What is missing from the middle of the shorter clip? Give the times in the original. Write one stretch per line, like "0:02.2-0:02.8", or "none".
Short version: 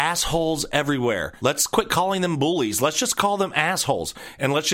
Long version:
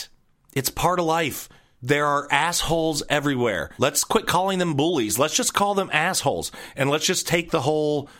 none